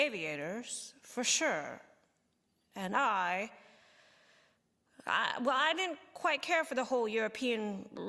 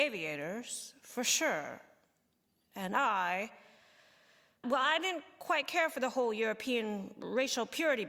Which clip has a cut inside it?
second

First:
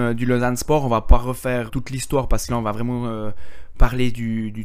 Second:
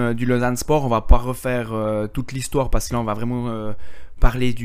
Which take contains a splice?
first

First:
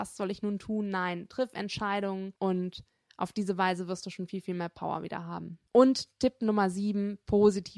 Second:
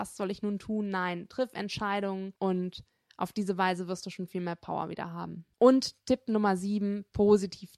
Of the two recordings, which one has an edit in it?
second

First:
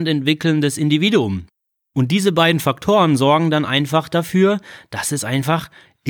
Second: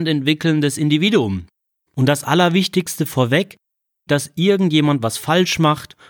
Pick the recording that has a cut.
second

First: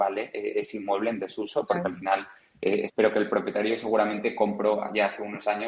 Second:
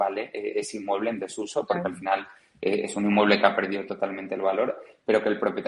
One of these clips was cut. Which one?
first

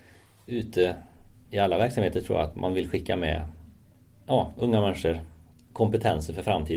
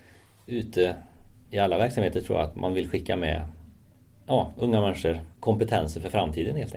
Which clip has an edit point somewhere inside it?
second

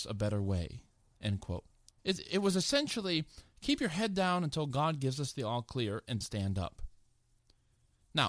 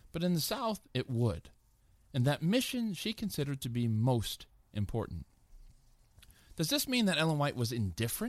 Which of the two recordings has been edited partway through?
first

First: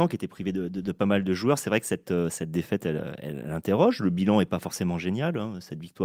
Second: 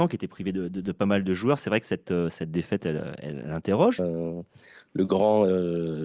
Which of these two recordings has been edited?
second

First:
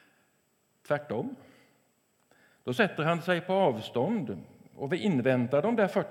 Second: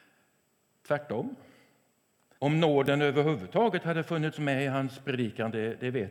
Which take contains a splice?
second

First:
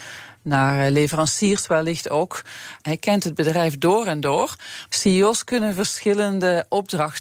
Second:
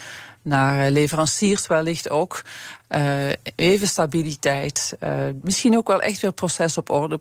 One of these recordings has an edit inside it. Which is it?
first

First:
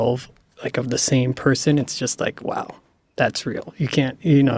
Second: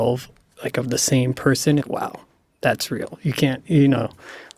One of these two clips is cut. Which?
second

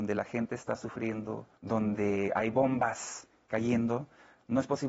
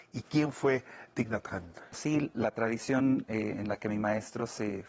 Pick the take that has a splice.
first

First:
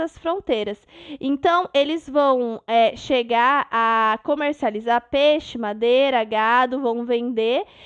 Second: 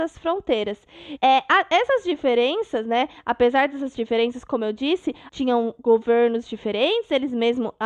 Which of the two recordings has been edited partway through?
second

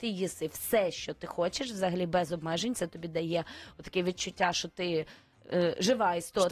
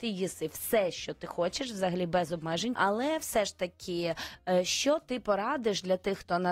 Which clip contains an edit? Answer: second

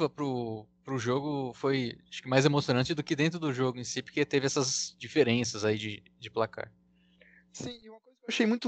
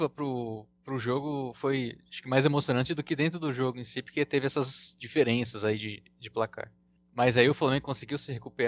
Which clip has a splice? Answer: second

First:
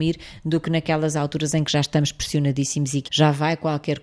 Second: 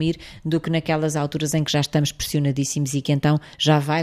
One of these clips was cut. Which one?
first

